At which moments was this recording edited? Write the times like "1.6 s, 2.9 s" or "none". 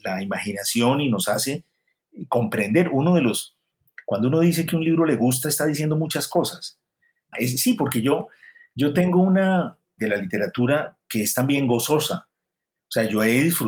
7.3 s, 10.0 s